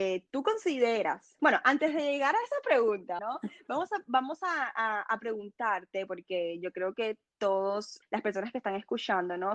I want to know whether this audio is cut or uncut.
cut